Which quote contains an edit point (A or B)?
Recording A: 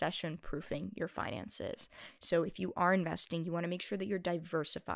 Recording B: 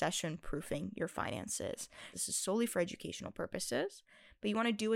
B